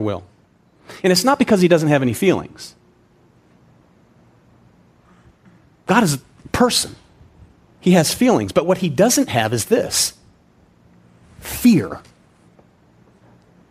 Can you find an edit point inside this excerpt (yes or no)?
no